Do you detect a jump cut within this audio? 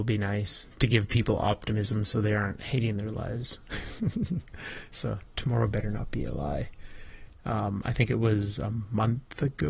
yes; 1 cut; at 7.3 s

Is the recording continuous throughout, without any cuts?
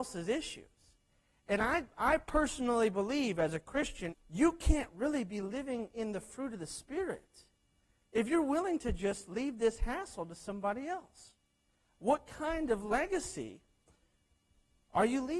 no; 1 cut; at 4.1 s

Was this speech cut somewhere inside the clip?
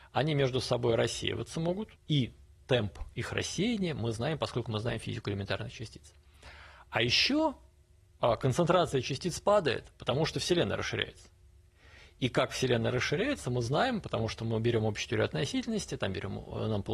yes; 1 cut; at 2.0 s

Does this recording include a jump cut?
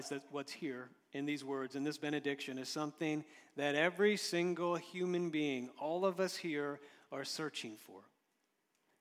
no; 0 cuts

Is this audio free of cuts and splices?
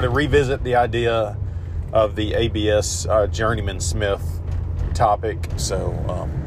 no; 1 cut; at 5.6 s

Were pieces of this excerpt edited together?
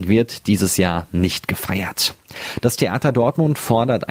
no; 0 cuts

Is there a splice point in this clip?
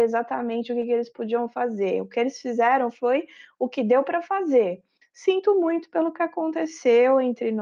yes; 1 cut; at 5.0 s

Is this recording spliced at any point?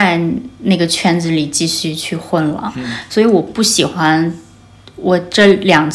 no; 0 cuts

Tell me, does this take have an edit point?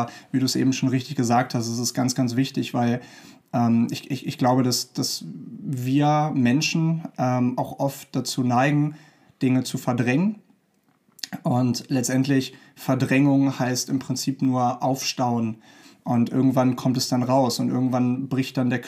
no; 0 cuts

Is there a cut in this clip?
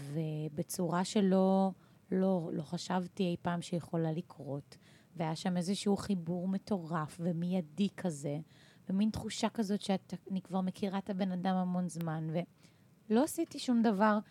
no; 0 cuts

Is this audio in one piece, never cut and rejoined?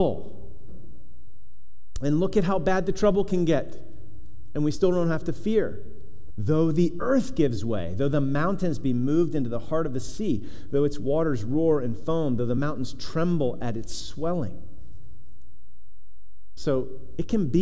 no; 1 cut; at 6.3 s

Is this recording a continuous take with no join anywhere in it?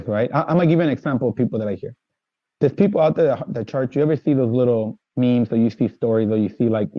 yes; 0 cuts

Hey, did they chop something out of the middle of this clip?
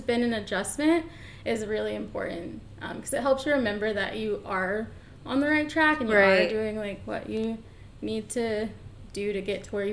yes; 1 cut; at 1.4 s

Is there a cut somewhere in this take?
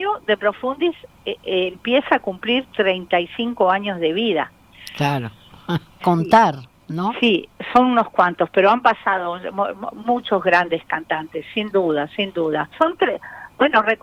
yes; 2 cuts; at 6.0 s, 12.7 s

